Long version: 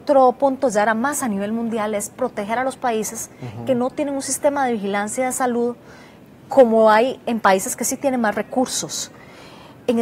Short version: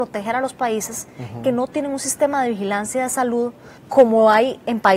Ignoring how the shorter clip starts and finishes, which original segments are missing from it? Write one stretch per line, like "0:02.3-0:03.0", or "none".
0:06.0-0:06.4